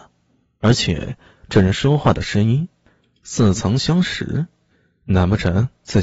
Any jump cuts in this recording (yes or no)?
no